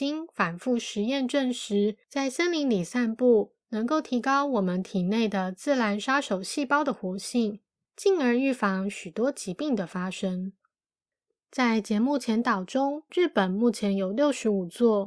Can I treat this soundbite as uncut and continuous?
no; 1 cut; at 13.1 s

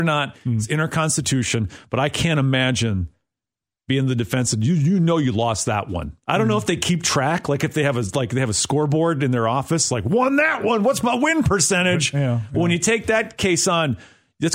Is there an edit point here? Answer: no; 0 cuts

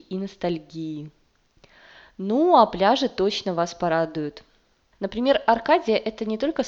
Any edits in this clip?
yes; 1 cut; at 4.9 s

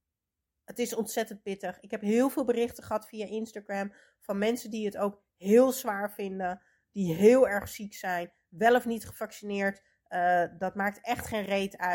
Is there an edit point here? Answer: no; 0 cuts

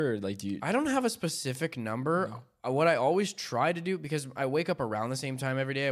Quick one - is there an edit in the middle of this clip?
no; 0 cuts

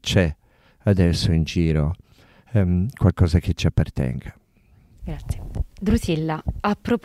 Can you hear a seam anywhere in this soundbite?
no; 0 cuts

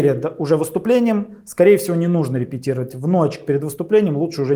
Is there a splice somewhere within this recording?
no; 0 cuts

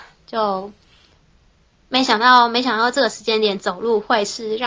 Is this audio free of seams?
yes; 0 cuts

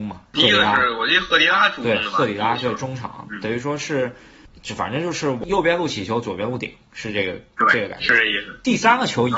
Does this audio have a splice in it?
no; 0 cuts

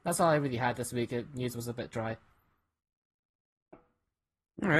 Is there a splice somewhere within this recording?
no; 0 cuts

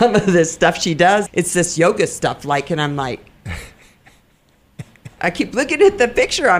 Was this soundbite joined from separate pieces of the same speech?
yes; 1 cut; at 1.3 s

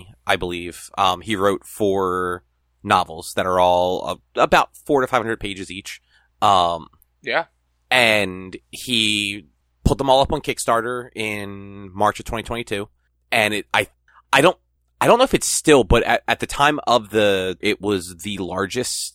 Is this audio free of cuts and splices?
no; 2 cuts; at 6.3 s, 17.6 s

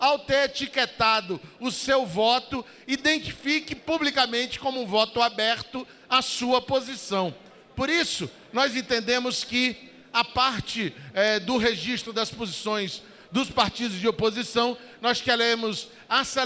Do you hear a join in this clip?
no; 0 cuts

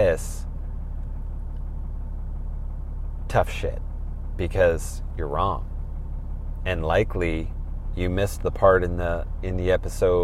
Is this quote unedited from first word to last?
yes; 0 cuts

